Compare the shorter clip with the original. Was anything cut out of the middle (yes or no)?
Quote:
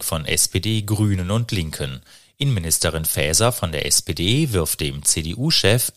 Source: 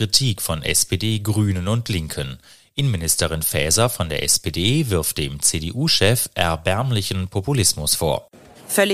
no